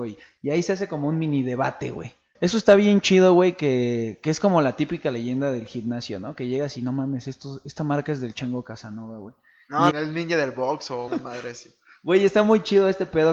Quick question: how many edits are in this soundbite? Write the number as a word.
three